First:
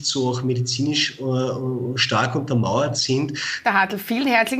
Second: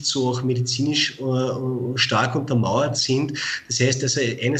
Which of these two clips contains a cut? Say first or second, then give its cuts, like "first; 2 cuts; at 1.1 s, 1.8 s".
first; 1 cut; at 3.6 s